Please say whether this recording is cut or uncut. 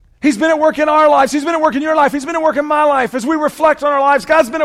uncut